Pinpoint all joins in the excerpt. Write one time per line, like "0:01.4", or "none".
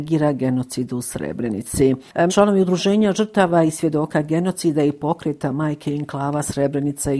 0:02.3